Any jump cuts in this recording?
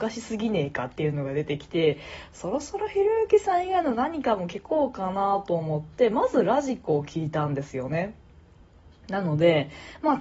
yes; 1 cut; at 9.0 s

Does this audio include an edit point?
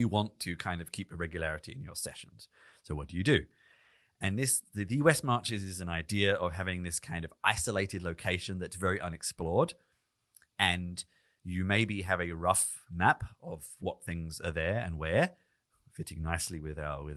no; 0 cuts

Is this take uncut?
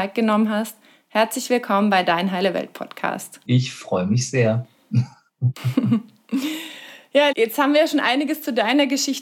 no; 2 cuts; at 3.5 s, 7.3 s

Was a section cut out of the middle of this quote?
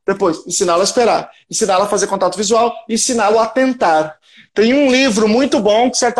no; 0 cuts

